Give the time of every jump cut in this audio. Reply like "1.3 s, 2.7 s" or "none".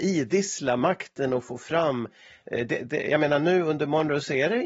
none